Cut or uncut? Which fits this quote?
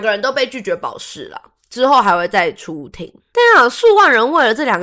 uncut